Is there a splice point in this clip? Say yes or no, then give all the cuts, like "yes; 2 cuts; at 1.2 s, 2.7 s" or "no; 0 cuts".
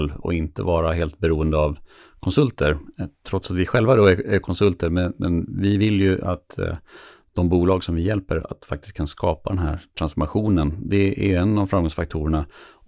no; 0 cuts